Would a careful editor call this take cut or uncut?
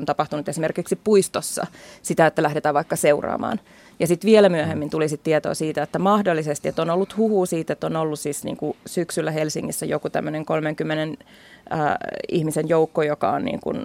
uncut